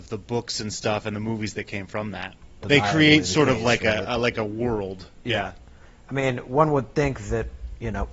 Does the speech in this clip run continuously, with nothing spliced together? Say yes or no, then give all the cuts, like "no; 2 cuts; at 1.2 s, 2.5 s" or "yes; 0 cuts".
no; 1 cut; at 2.6 s